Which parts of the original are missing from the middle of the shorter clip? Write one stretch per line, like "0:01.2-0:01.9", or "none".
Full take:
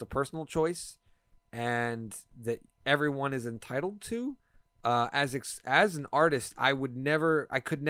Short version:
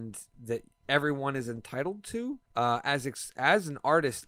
0:04.4-0:04.7